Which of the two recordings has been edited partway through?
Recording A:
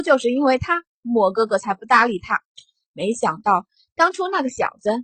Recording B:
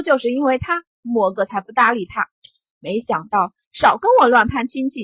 B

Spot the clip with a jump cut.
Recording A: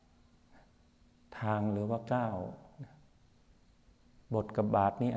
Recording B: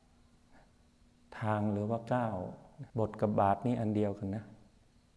B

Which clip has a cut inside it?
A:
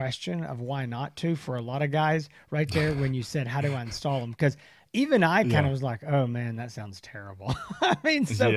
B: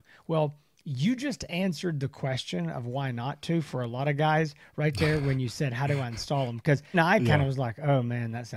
B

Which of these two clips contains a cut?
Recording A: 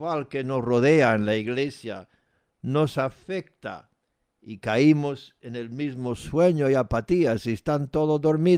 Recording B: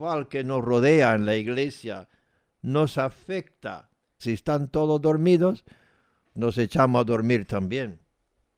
B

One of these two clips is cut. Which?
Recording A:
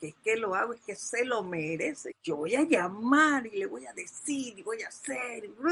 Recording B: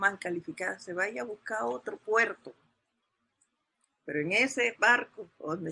A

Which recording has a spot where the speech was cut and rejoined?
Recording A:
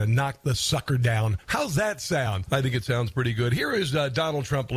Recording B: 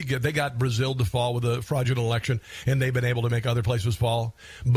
A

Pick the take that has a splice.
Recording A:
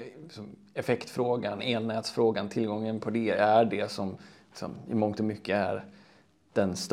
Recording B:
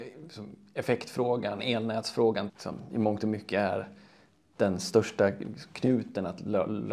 B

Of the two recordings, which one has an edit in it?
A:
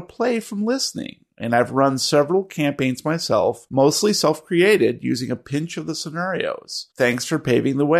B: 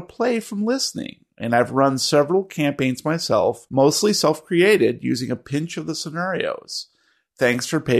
A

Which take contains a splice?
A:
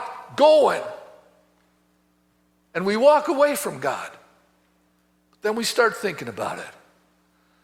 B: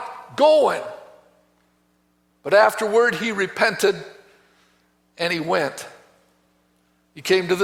B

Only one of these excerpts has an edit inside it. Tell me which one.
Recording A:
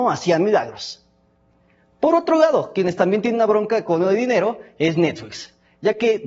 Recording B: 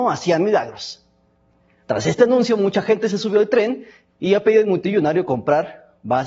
B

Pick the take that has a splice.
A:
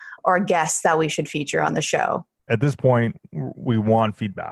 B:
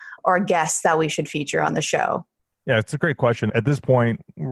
A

